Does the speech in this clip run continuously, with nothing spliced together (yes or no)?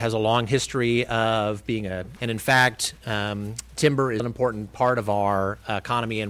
no